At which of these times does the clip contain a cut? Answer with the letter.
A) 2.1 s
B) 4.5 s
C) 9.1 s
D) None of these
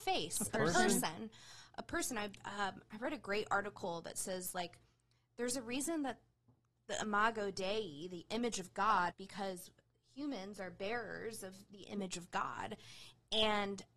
C